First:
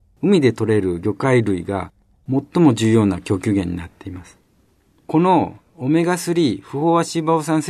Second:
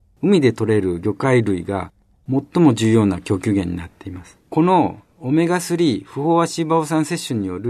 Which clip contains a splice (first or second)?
second